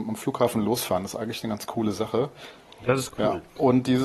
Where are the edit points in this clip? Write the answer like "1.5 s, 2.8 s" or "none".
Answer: none